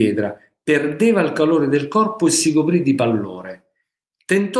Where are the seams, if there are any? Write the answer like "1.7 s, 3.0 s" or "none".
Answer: none